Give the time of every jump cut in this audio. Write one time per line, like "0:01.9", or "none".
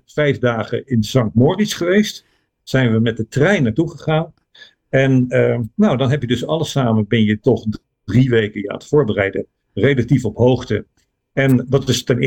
none